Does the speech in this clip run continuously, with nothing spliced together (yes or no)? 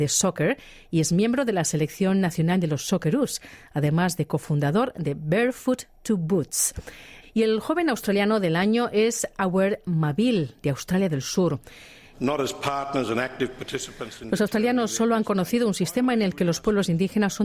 no